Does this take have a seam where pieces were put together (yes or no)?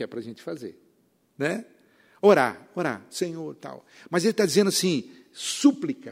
no